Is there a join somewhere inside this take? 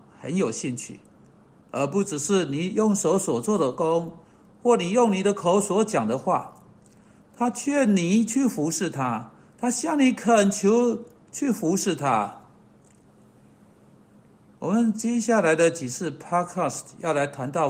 yes; 2 cuts; at 7.2 s, 9.5 s

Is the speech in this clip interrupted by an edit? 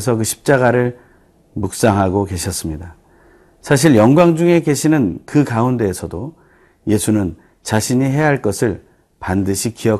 no; 0 cuts

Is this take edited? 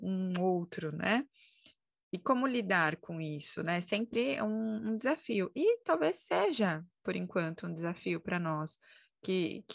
no; 0 cuts

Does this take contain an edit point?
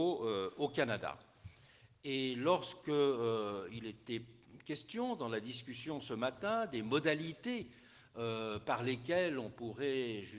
no; 0 cuts

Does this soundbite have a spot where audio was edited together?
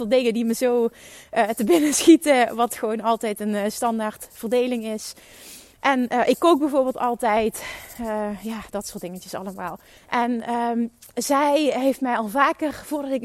yes; 1 cut; at 10.0 s

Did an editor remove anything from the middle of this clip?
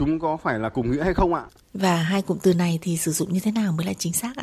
yes; 1 cut; at 1.6 s

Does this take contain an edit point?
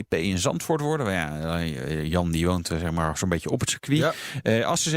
no; 0 cuts

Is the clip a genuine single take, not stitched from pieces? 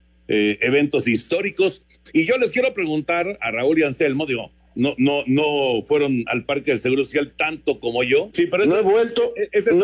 no; 1 cut; at 8.3 s

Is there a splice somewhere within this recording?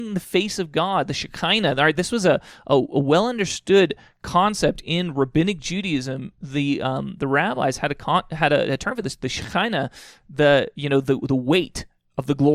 no; 0 cuts

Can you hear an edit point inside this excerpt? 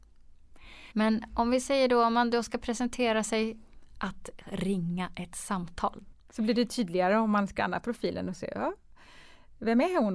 yes; 2 cuts; at 0.9 s, 6.1 s

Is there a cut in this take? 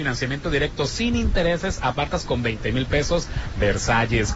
no; 0 cuts

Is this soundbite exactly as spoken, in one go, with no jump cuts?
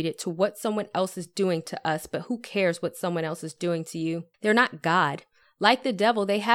no; 1 cut; at 4.3 s

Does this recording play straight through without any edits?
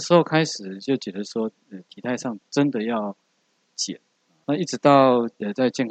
no; 1 cut; at 4.4 s

